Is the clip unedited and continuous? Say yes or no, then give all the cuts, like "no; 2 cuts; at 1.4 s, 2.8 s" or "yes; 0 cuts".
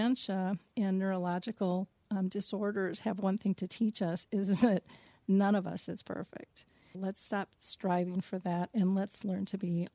no; 1 cut; at 6.9 s